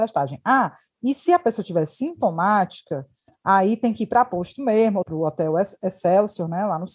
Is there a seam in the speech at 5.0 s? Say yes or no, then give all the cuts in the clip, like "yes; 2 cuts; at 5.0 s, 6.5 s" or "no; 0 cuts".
yes; 1 cut; at 5.0 s